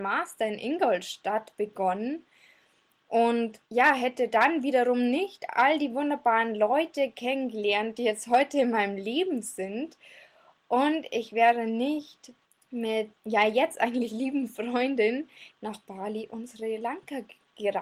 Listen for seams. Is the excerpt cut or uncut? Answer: cut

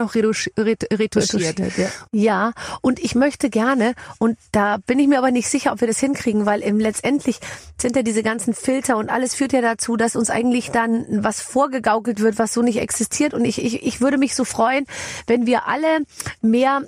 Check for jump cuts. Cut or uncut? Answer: cut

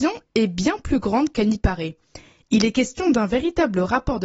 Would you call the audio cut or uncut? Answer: uncut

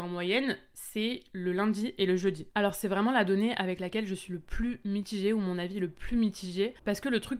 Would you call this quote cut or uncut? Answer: uncut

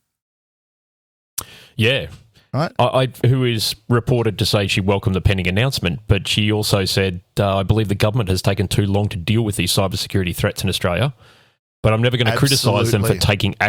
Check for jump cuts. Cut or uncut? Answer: cut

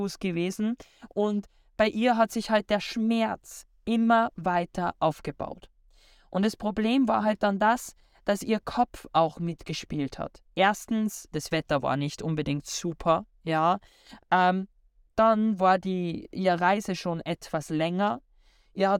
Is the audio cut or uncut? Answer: cut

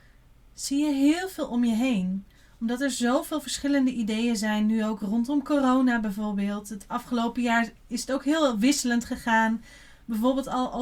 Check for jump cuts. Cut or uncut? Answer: uncut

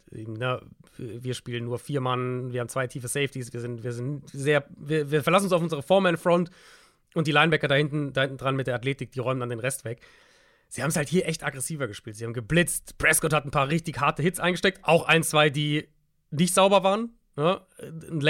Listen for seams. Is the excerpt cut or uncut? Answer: uncut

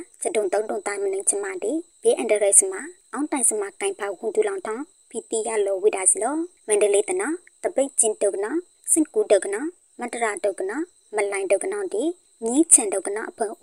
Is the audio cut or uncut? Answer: uncut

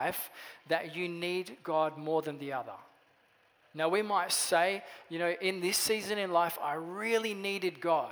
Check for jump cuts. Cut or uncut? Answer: uncut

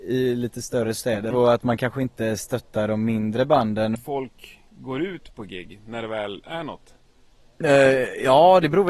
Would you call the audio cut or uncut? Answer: cut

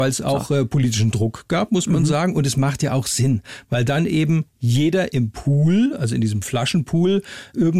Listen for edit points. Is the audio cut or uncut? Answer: uncut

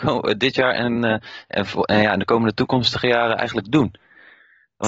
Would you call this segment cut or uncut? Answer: uncut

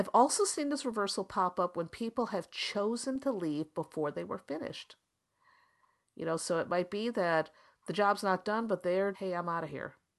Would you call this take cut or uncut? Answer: cut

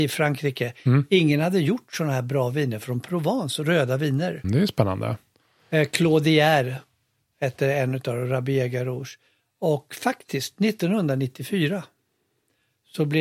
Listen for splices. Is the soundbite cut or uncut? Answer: cut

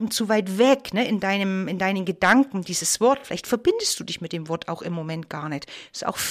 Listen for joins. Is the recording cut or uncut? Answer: uncut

